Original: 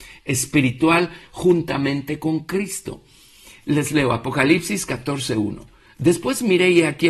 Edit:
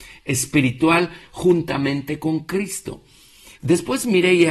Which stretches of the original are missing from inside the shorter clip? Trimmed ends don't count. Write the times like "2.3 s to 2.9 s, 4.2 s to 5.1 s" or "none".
3.6 s to 5.9 s